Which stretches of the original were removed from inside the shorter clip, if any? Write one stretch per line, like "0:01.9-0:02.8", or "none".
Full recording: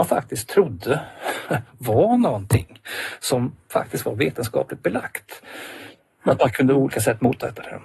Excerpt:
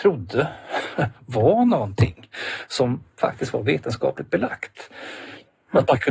none